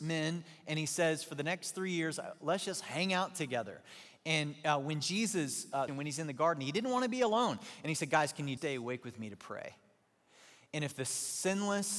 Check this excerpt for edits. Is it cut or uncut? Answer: cut